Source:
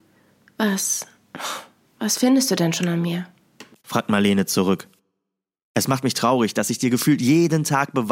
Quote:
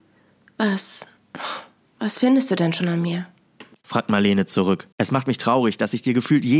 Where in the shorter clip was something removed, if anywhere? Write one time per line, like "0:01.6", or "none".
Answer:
0:04.9